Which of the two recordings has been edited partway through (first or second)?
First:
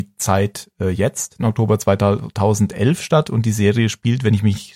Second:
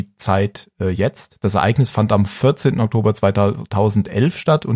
first